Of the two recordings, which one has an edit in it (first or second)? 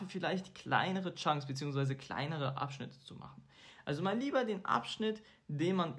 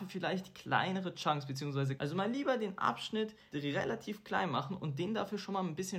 second